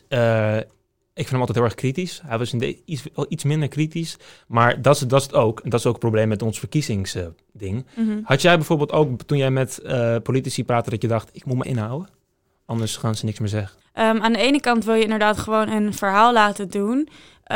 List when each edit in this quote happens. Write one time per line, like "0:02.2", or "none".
0:11.6
0:13.8